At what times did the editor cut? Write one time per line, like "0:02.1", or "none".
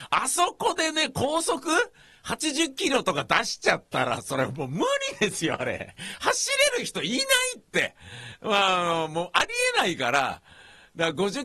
none